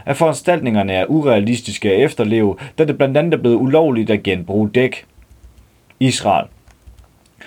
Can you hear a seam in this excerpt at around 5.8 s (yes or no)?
no